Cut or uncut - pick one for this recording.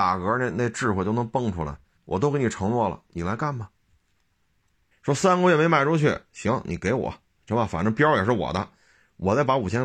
cut